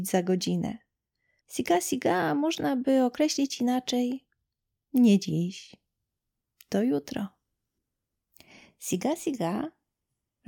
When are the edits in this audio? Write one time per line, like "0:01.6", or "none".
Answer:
0:01.4